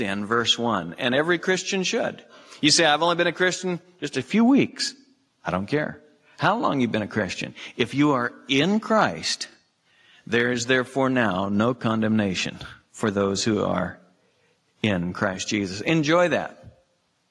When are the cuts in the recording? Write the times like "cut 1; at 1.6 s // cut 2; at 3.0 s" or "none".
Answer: none

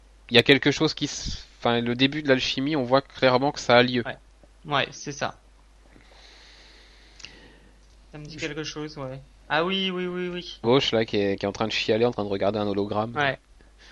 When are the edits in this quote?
cut 1; at 7.9 s // cut 2; at 9.4 s // cut 3; at 10.6 s

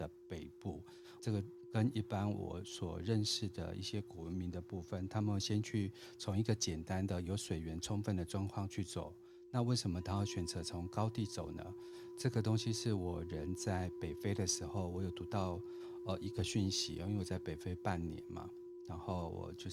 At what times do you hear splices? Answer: cut 1; at 1.2 s

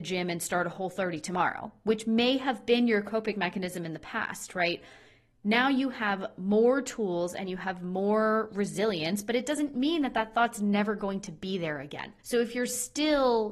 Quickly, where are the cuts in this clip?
cut 1; at 12.2 s

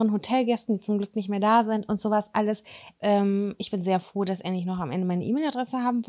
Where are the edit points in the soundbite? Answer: cut 1; at 3.0 s

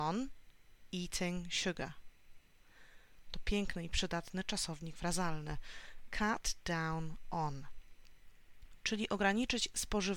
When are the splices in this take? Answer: cut 1; at 3.2 s

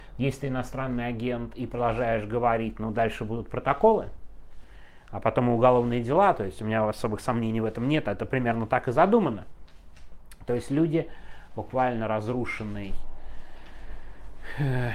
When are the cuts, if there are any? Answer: cut 1; at 11.5 s

